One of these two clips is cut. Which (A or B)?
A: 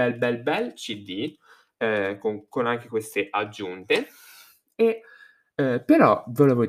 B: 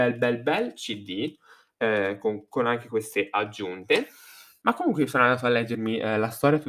B